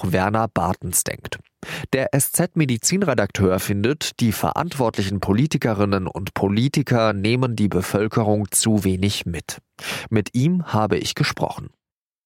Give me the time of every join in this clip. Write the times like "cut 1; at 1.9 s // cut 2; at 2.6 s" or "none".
none